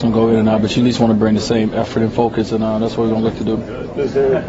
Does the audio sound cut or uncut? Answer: uncut